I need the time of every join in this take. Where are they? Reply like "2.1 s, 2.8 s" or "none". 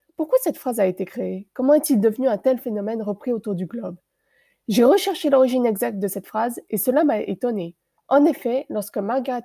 8.0 s